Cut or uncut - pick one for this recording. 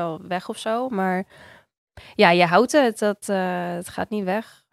uncut